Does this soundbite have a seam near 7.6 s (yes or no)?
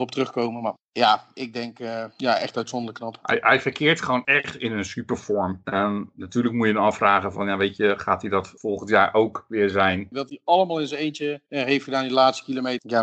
no